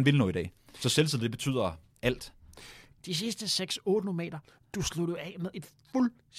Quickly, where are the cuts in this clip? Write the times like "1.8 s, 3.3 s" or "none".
3.0 s

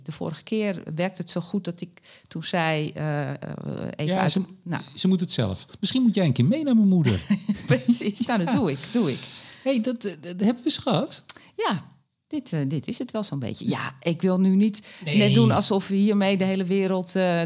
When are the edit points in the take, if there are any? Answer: none

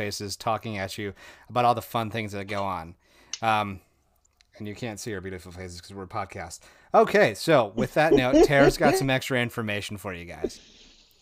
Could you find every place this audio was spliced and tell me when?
none

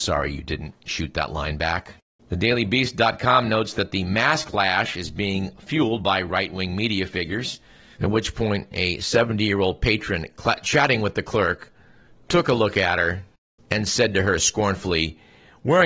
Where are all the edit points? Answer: 7.9 s

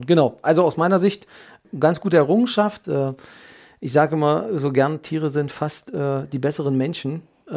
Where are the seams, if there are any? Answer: 2.8 s

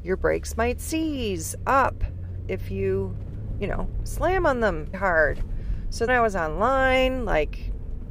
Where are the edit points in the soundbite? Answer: 4.9 s, 6.1 s

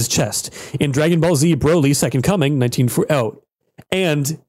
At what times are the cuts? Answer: none

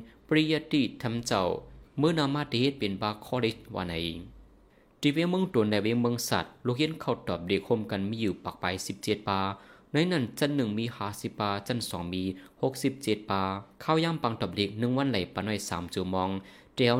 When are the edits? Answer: 13.7 s

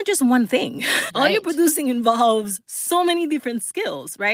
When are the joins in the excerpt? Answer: 1.1 s

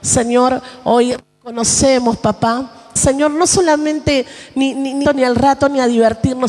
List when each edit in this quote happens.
3.0 s, 5.0 s

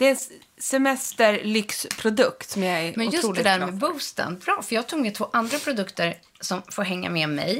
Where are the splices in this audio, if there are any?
none

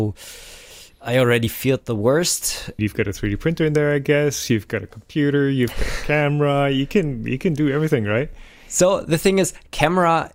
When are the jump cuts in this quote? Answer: 2.8 s

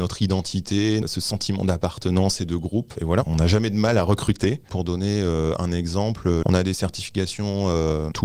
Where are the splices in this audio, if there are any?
6.4 s

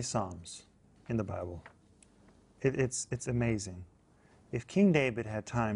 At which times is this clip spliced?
none

